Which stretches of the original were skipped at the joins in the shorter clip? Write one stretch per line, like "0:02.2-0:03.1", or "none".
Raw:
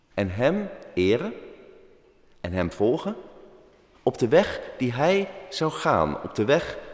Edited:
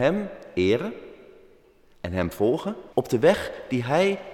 0:03.3-0:04.0